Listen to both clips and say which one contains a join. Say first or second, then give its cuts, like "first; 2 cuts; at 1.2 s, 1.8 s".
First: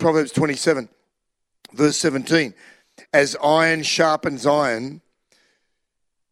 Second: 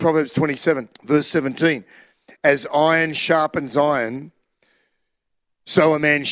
second; 1 cut; at 0.9 s